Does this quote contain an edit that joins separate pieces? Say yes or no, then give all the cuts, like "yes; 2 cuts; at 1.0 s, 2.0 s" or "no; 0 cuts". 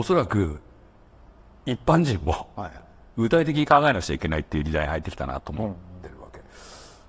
no; 0 cuts